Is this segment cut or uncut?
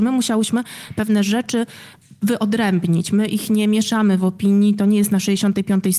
uncut